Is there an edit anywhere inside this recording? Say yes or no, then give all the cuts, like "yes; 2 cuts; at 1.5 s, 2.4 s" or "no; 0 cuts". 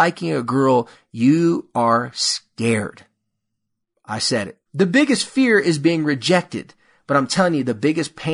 yes; 1 cut; at 4.7 s